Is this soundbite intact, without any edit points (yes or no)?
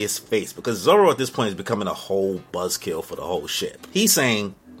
yes